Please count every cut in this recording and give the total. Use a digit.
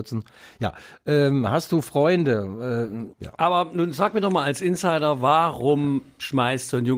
1